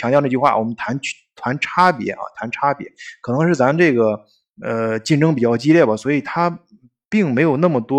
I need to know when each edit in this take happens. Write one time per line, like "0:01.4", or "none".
none